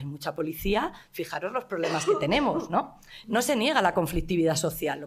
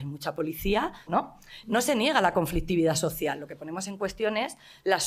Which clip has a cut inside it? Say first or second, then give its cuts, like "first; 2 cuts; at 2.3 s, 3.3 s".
second; 1 cut; at 1.1 s